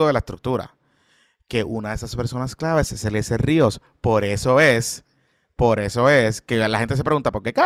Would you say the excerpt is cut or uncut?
uncut